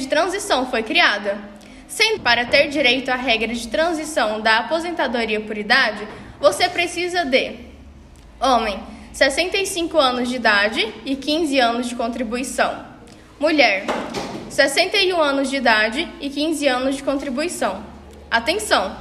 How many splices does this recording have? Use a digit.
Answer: 1